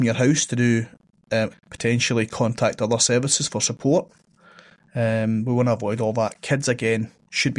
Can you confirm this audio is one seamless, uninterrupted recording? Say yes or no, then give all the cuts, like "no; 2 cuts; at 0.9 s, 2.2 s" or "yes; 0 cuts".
no; 1 cut; at 1.5 s